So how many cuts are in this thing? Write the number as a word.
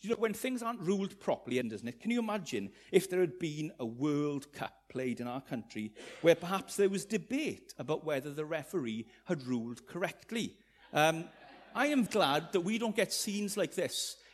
two